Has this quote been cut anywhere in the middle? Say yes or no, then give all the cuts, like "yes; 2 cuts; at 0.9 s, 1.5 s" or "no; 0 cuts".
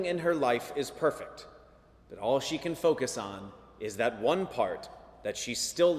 no; 0 cuts